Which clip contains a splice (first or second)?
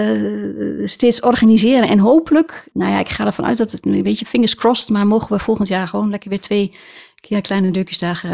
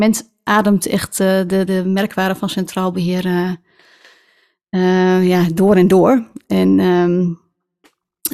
first